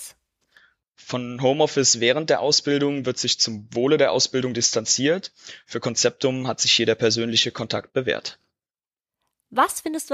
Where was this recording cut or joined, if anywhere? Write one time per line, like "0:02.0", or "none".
none